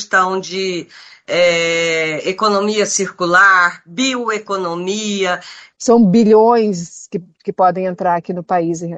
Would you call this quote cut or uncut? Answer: cut